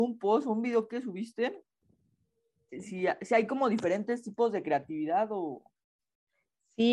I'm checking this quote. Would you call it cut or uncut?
uncut